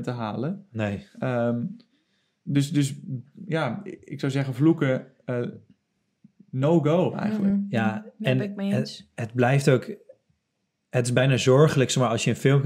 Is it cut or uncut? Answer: uncut